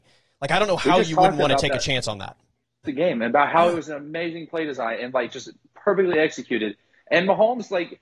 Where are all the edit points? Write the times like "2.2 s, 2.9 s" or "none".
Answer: 2.8 s